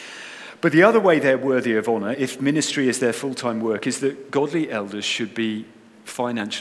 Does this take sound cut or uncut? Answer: uncut